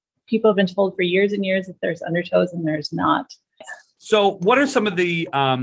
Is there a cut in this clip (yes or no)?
yes